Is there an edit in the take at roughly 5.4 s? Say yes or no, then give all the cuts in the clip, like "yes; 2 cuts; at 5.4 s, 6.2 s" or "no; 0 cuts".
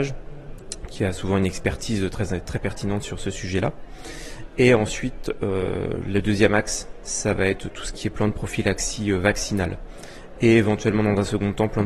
no; 0 cuts